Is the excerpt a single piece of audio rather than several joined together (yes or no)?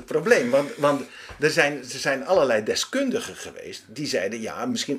yes